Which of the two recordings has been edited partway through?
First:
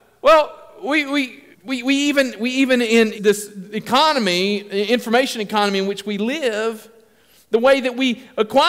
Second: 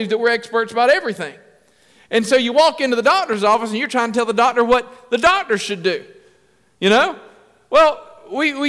first; 2 cuts; at 1.5 s, 3.1 s

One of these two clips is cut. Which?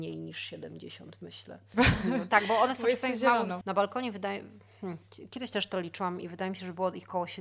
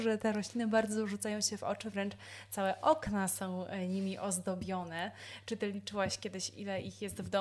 first; 2 cuts; at 1.7 s, 3.6 s

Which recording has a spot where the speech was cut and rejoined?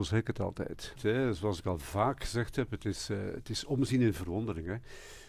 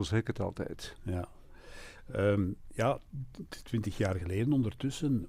first; 1 cut; at 1.0 s

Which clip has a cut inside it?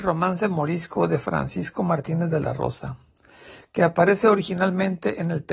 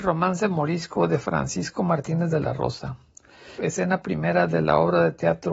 second; 1 cut; at 3.6 s

